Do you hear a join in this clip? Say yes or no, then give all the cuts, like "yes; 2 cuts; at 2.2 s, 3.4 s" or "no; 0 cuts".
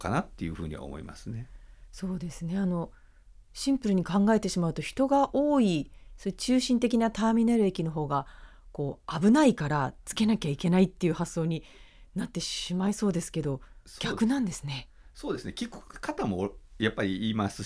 no; 0 cuts